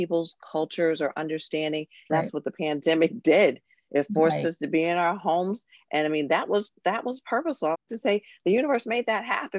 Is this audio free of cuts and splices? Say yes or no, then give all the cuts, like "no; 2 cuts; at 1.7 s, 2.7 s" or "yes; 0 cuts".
no; 2 cuts; at 2.1 s, 7.7 s